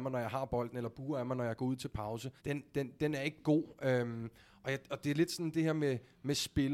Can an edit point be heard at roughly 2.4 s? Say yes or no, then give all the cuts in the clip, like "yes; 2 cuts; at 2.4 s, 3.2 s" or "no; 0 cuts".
yes; 1 cut; at 2.4 s